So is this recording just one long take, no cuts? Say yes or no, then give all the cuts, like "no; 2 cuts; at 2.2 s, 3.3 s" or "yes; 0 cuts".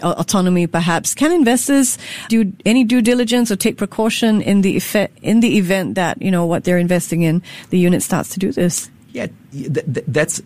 no; 1 cut; at 2.3 s